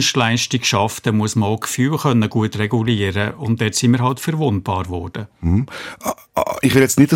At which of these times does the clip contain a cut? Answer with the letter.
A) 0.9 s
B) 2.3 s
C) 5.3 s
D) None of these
D